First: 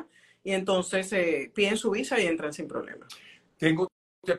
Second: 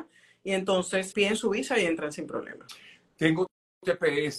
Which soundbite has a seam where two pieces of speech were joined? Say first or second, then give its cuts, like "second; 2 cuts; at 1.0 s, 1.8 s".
second; 1 cut; at 1.1 s